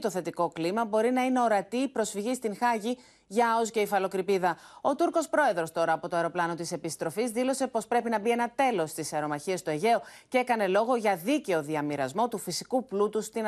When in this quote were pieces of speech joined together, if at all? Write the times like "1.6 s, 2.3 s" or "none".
none

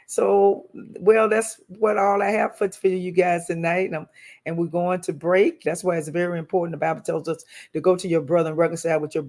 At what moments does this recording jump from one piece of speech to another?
5.6 s

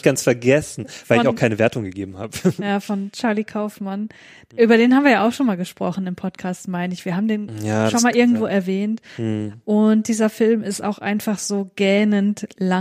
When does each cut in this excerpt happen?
none

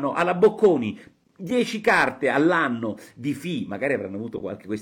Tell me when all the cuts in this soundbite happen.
none

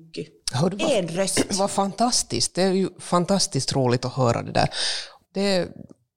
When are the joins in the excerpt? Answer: 5.2 s

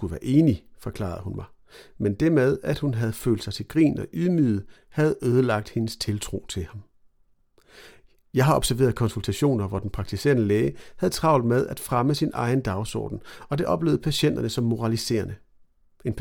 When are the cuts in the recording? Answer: none

